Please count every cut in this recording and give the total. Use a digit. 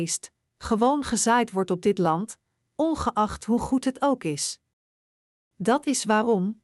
1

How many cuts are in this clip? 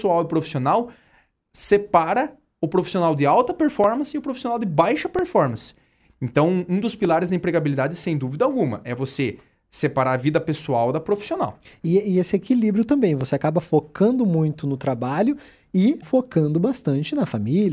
1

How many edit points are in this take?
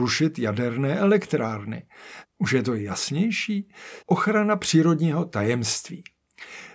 2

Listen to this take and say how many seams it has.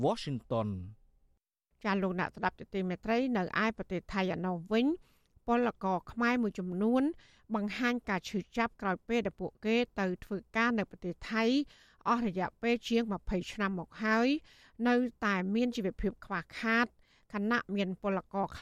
0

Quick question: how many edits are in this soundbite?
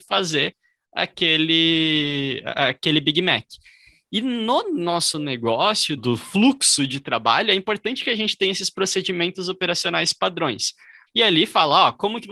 2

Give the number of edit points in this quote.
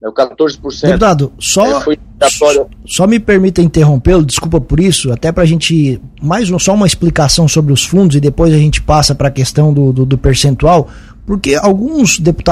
0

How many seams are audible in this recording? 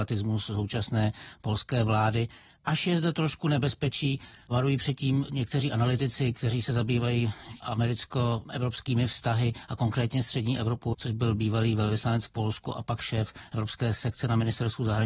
1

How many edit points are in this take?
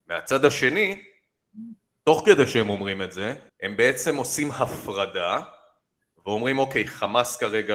1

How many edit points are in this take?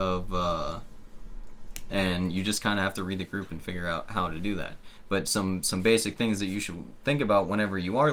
1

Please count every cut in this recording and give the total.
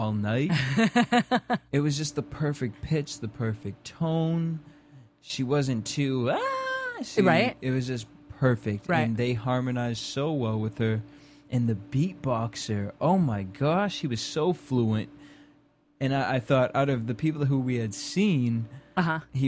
0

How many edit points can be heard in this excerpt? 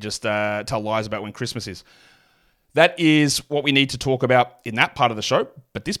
0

